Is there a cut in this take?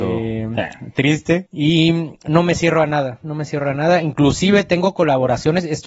no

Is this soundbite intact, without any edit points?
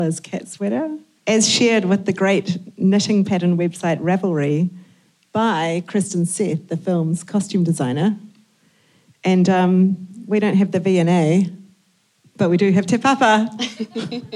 no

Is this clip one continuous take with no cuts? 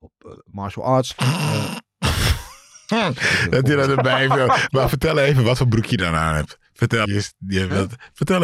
no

